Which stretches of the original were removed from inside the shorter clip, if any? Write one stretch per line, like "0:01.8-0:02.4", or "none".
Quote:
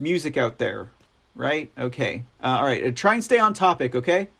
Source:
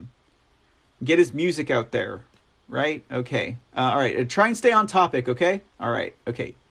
none